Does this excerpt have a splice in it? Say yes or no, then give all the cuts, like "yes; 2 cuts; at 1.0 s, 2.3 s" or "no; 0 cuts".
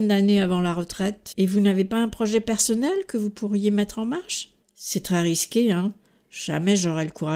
yes; 2 cuts; at 1.3 s, 4.6 s